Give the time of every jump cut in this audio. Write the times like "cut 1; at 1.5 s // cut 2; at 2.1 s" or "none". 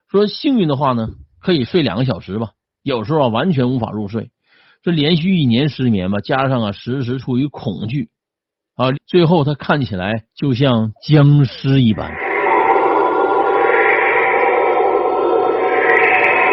cut 1; at 8.9 s // cut 2; at 10.3 s